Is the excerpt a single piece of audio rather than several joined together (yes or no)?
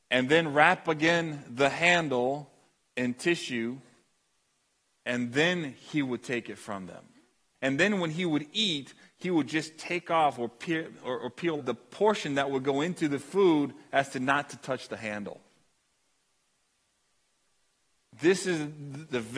no